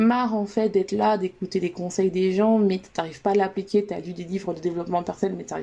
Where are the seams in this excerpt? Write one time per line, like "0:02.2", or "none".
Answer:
none